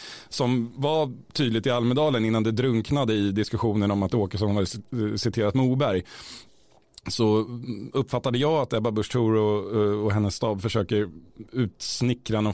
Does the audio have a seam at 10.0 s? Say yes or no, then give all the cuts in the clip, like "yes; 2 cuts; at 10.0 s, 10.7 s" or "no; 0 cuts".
no; 0 cuts